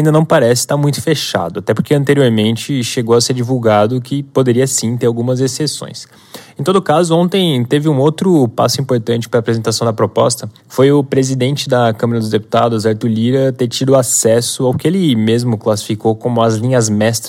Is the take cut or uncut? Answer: cut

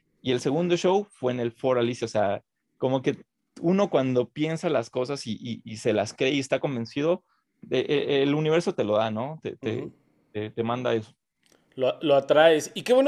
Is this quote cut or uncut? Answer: uncut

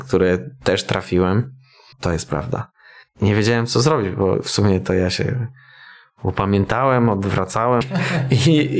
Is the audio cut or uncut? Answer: cut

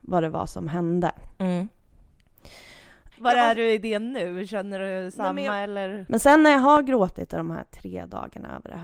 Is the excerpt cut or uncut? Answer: cut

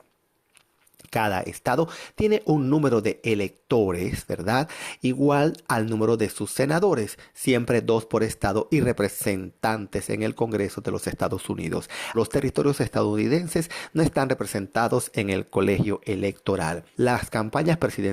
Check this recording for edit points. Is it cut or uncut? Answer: cut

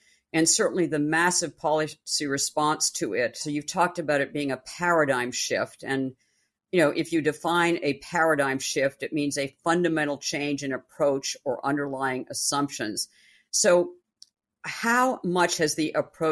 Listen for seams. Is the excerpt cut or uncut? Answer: uncut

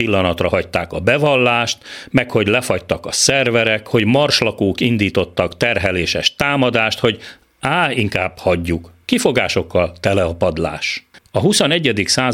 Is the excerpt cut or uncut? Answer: cut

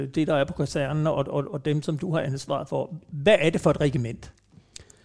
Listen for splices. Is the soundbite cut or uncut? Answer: uncut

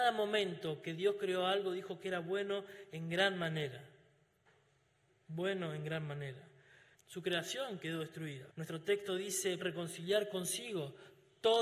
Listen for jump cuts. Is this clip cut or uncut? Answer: cut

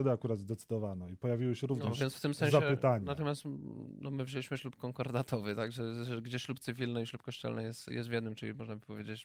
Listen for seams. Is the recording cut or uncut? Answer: cut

